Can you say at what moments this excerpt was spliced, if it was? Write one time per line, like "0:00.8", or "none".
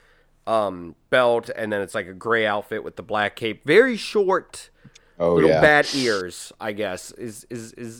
none